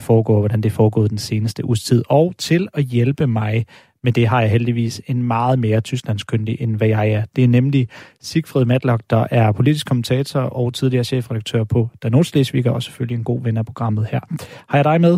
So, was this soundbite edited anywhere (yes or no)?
no